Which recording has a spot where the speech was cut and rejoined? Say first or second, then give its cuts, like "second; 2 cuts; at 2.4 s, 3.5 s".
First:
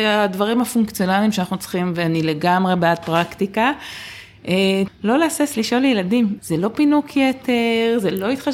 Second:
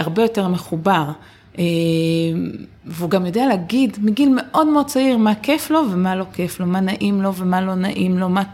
first; 2 cuts; at 4.9 s, 6.4 s